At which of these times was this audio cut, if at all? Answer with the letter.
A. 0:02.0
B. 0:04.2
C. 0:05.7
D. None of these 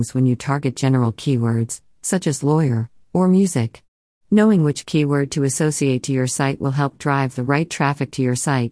B